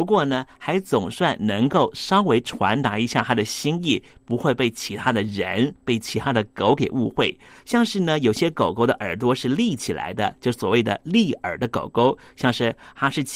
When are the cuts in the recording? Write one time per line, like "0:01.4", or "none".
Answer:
0:07.6